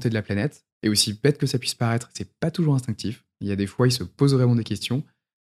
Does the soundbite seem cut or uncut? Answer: uncut